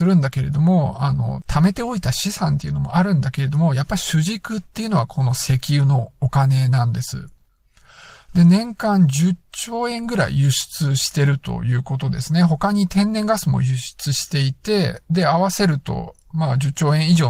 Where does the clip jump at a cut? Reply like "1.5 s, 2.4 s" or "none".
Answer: none

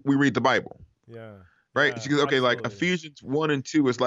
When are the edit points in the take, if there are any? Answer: none

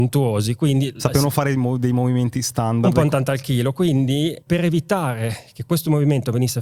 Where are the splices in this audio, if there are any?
none

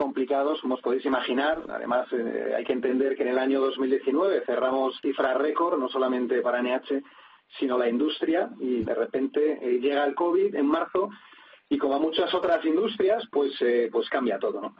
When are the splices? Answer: 8.8 s

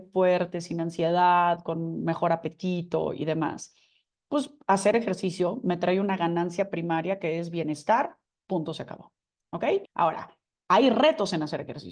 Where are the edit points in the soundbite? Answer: 9.9 s

